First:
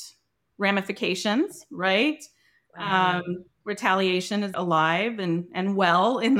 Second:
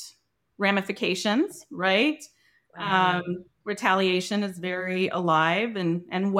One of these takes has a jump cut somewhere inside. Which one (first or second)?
first